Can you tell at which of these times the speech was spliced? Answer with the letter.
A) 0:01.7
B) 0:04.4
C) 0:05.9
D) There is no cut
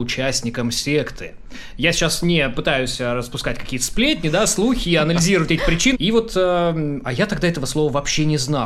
C